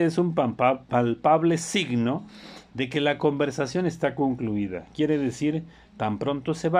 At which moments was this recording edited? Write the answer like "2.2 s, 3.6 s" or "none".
none